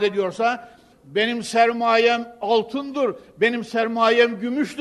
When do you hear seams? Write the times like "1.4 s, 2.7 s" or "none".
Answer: 0.9 s